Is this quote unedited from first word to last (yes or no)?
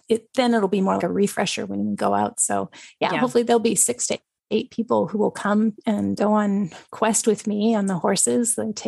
no